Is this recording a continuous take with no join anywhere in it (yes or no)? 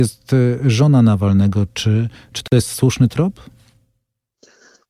no